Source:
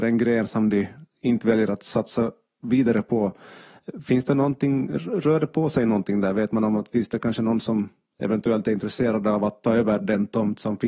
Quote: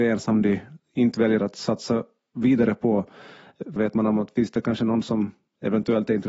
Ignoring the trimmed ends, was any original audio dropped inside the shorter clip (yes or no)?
yes